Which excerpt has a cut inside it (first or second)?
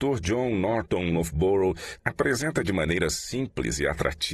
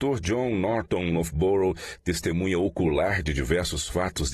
first